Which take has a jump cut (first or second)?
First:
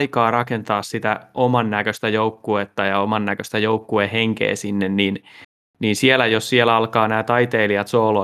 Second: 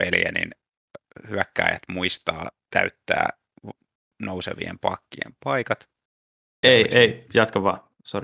second